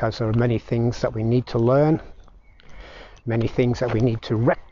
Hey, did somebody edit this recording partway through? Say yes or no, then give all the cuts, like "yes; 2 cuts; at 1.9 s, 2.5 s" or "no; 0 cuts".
yes; 1 cut; at 3.2 s